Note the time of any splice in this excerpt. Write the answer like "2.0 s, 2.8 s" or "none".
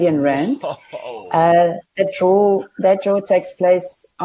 none